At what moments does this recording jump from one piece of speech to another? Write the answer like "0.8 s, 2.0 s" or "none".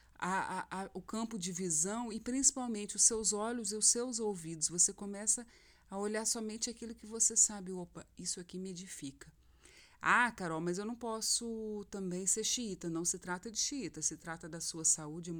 none